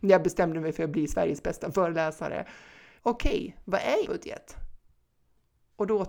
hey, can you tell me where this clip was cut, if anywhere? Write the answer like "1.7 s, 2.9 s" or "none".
3.0 s, 4.0 s